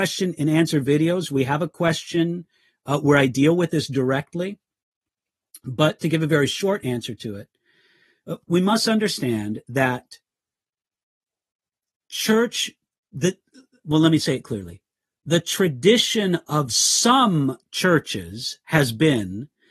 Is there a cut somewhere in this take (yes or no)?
yes